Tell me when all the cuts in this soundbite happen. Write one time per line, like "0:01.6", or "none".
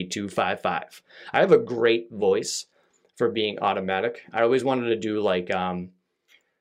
none